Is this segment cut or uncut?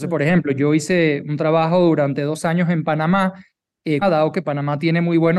cut